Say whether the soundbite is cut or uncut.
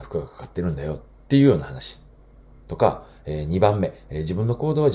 uncut